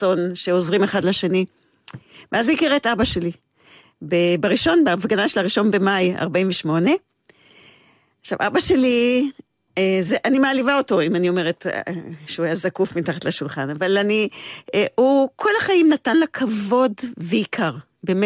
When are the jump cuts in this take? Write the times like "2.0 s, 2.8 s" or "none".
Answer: none